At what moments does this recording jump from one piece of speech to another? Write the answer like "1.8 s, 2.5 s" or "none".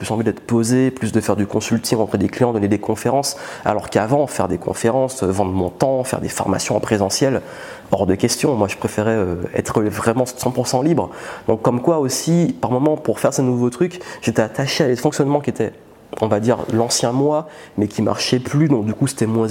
none

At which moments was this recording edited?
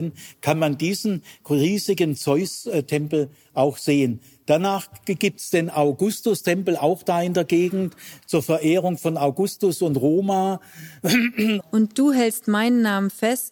11.6 s

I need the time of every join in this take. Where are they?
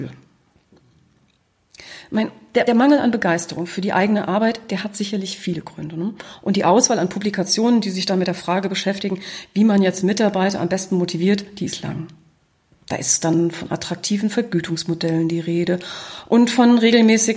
2.7 s

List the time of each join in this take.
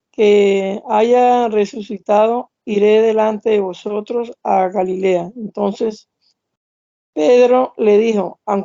none

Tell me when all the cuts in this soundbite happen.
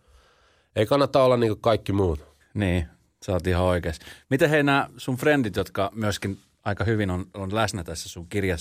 2.4 s

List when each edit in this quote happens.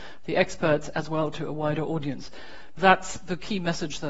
2.8 s

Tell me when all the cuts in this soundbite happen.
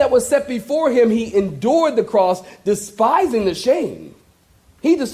none

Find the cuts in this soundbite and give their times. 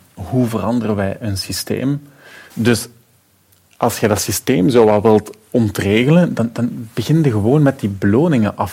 2.5 s

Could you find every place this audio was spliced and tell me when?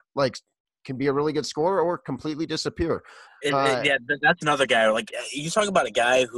3.2 s

